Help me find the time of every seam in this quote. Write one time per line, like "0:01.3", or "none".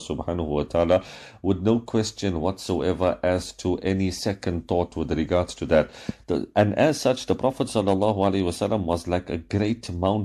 0:06.2

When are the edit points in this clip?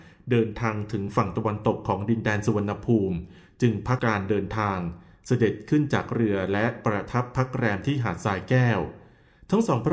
0:04.0

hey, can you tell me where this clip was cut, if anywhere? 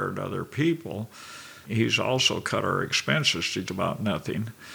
0:01.7
0:03.7

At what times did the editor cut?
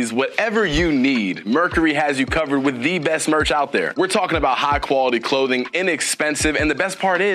none

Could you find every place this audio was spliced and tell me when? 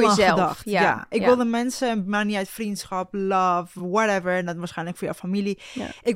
none

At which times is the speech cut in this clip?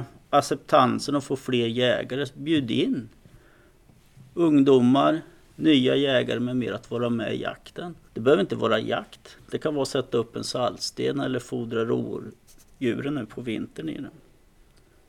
0:08.1

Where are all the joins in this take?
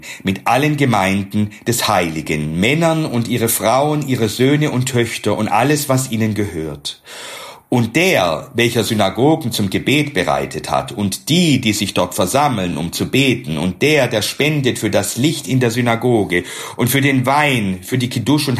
none

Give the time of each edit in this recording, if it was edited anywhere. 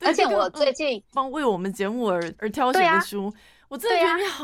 0:01.1

